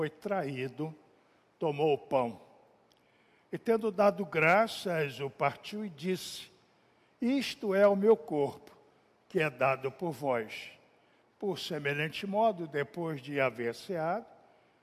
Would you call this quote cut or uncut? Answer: cut